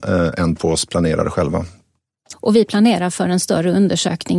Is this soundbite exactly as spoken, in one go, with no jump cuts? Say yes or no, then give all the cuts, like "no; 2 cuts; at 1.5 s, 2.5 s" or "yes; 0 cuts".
no; 1 cut; at 2.3 s